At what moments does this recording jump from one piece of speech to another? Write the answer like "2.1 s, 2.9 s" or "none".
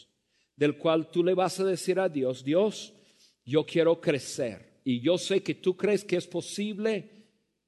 none